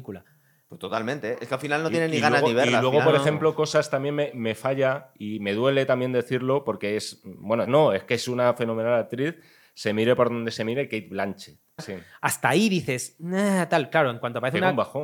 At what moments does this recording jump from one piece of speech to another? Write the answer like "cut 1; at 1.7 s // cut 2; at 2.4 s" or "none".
cut 1; at 7.6 s // cut 2; at 11.8 s